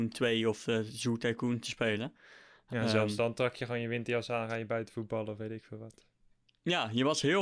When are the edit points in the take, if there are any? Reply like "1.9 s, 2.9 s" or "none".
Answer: none